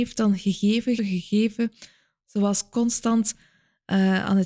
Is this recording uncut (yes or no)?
no